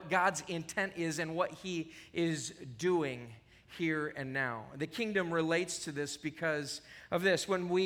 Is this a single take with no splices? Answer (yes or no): yes